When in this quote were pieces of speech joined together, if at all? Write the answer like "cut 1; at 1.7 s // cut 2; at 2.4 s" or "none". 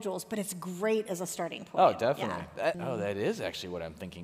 cut 1; at 2.7 s